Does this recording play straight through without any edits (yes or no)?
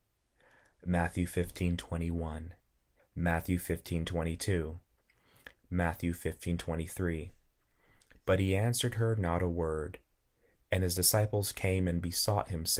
no